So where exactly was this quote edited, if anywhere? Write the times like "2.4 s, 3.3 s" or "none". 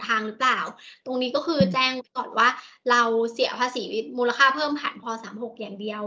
5.0 s